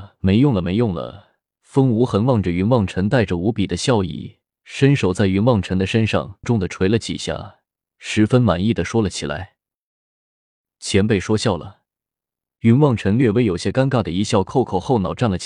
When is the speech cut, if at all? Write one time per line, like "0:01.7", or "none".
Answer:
0:06.4